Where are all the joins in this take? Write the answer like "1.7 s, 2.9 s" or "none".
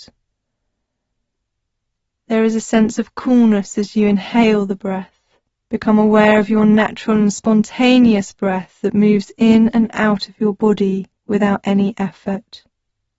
5.5 s, 11.2 s